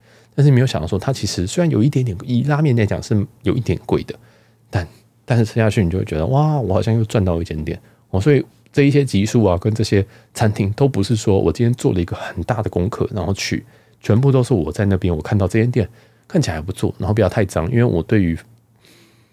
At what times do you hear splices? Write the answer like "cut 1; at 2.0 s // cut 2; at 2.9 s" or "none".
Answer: none

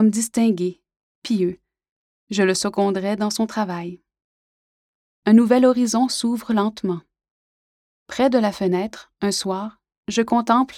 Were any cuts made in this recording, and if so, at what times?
cut 1; at 5.1 s // cut 2; at 7.9 s

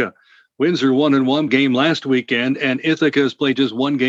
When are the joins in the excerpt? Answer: cut 1; at 1.5 s

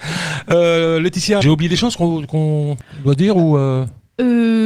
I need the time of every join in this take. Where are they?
cut 1; at 1.4 s

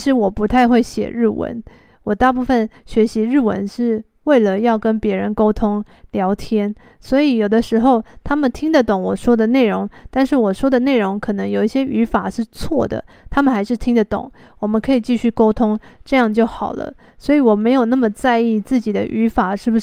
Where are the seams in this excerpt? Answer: none

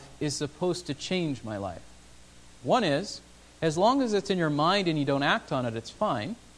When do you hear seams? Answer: cut 1; at 2.6 s

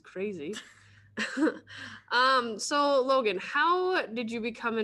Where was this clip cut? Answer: none

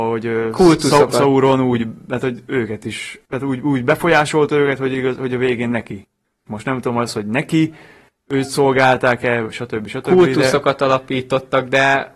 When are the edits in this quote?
cut 1; at 6.5 s

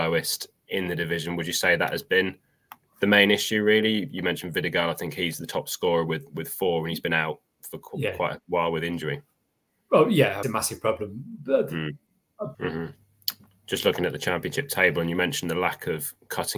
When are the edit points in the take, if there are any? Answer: cut 1; at 10.4 s // cut 2; at 12.5 s

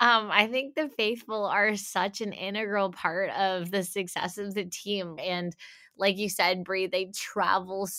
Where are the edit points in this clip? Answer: cut 1; at 5.2 s

